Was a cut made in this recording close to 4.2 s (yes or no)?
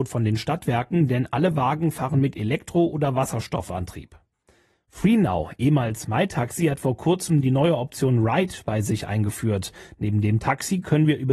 no